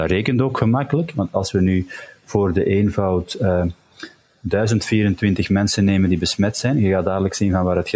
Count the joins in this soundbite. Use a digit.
0